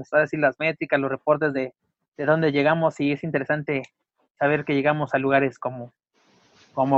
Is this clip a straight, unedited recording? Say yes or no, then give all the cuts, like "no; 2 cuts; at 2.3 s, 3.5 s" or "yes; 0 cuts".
yes; 0 cuts